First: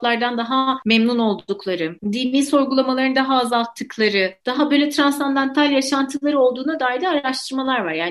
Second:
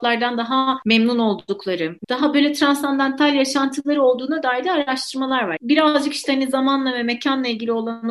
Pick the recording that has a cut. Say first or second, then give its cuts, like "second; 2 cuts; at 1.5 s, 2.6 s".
second; 2 cuts; at 2.0 s, 5.6 s